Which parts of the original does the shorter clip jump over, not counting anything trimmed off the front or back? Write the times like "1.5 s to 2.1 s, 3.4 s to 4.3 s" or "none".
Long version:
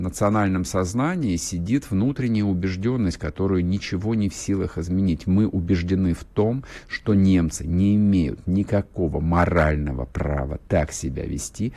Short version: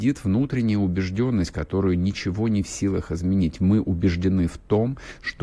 none